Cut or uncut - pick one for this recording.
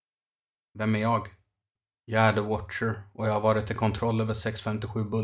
uncut